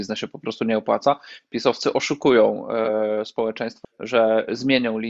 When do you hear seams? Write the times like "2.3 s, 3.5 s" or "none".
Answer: 1.4 s, 3.8 s